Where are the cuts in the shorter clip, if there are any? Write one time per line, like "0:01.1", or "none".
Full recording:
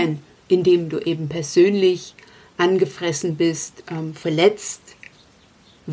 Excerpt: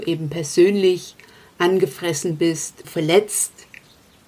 0:02.8